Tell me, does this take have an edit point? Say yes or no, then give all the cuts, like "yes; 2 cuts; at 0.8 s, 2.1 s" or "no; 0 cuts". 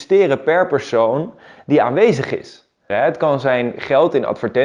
yes; 1 cut; at 2.9 s